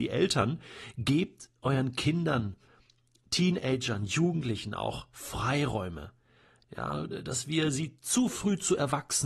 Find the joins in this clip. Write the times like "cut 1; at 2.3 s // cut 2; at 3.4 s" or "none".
cut 1; at 6.6 s